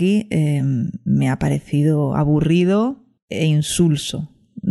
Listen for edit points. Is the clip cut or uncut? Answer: uncut